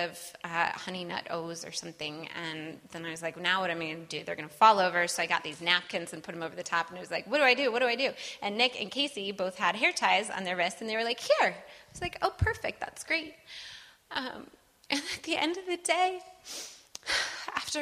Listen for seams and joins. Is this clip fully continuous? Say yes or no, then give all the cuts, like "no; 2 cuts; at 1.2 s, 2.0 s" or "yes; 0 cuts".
yes; 0 cuts